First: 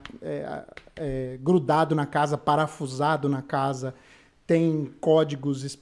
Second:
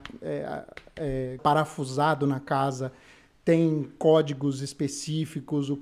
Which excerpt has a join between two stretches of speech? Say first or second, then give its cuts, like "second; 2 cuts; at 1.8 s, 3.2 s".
second; 1 cut; at 1.4 s